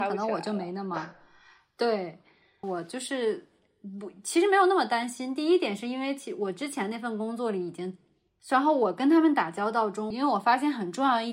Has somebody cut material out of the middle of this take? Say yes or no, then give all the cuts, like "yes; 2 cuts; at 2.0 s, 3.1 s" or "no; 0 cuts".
yes; 3 cuts; at 2.6 s, 8.4 s, 10.1 s